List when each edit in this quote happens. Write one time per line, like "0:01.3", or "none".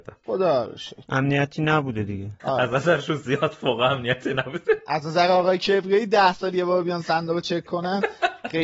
none